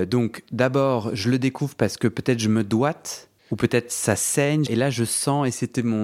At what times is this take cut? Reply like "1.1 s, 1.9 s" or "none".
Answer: 3.4 s, 4.7 s